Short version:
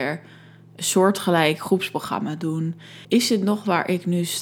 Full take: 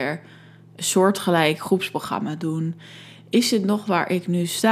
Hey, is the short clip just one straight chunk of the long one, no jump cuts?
no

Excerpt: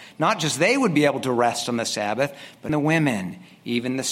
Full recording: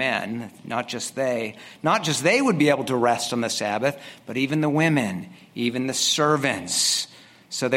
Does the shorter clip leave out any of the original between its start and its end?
yes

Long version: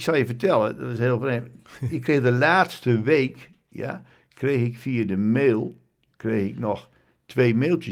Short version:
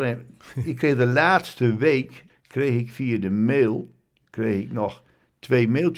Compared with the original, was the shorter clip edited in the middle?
yes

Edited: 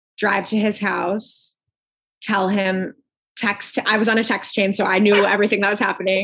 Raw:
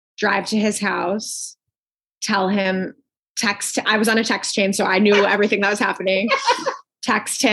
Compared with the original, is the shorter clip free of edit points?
yes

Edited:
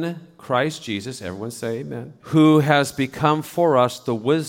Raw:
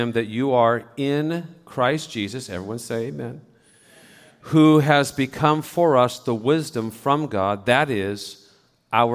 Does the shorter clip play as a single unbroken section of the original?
no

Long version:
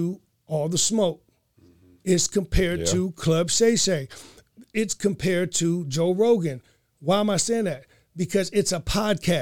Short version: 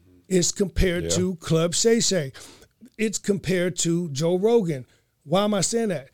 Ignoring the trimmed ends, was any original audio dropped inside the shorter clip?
no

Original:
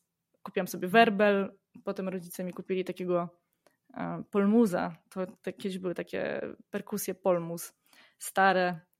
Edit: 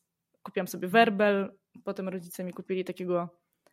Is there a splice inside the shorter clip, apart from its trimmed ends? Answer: no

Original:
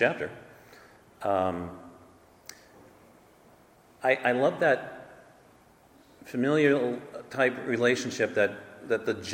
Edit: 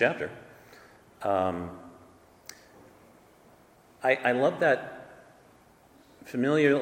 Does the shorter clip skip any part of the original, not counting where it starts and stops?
no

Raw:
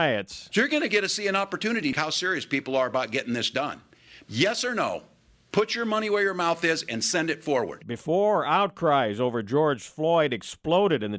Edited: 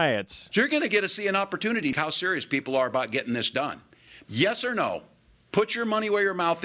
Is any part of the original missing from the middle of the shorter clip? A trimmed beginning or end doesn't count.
no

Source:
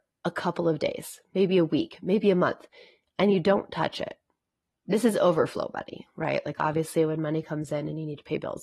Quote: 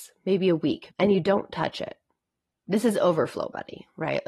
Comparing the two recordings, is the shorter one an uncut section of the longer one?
no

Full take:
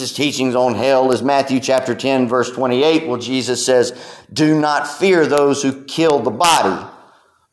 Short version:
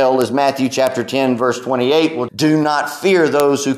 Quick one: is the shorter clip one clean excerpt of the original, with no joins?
no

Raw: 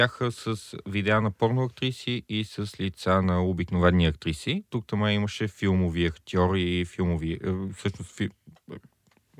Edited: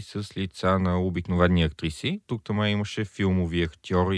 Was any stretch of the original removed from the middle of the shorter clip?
no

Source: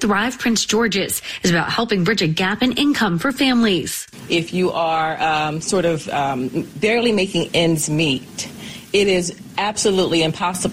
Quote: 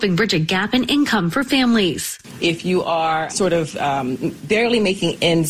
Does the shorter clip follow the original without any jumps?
no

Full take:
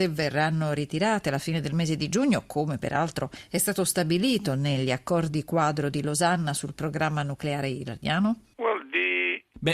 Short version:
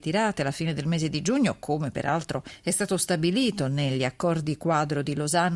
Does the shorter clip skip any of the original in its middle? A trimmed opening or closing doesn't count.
no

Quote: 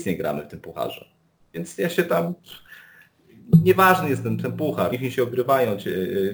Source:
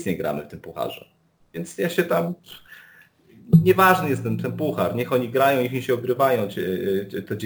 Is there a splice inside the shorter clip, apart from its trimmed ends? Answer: yes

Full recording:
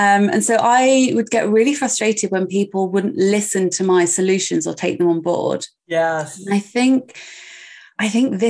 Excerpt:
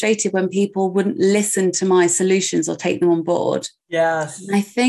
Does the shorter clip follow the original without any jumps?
yes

